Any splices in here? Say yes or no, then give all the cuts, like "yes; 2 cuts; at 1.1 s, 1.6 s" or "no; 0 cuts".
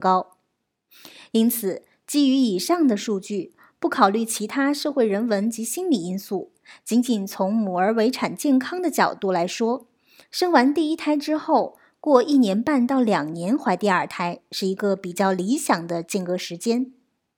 no; 0 cuts